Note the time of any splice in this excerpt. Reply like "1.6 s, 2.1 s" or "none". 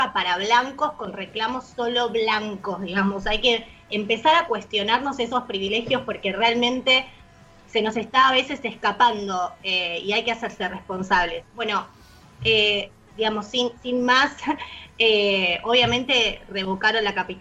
none